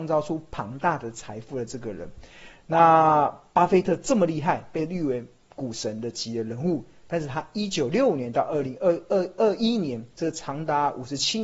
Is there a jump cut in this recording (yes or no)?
no